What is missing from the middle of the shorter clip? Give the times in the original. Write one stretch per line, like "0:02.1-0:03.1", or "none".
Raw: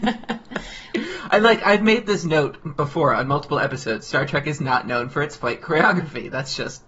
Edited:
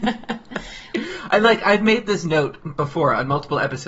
none